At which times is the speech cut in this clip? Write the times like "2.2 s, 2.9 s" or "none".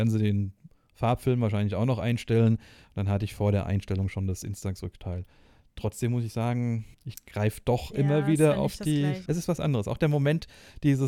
6.9 s, 9.3 s